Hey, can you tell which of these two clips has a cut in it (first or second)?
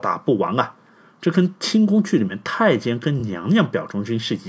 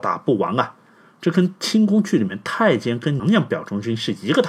second